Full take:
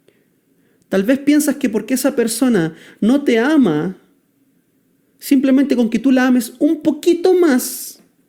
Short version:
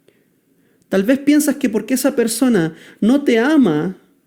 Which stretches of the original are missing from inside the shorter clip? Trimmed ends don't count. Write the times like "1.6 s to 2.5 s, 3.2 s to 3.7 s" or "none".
none